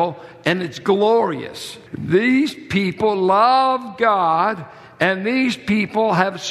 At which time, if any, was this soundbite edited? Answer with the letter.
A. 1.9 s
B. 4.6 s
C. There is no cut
A